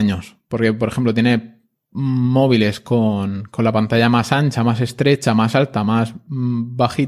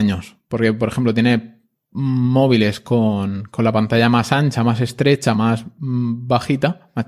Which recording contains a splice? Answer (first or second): second